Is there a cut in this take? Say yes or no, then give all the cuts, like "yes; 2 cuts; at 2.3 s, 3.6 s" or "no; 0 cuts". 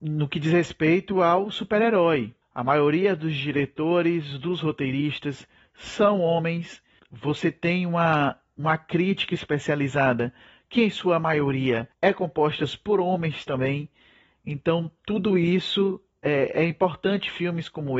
no; 0 cuts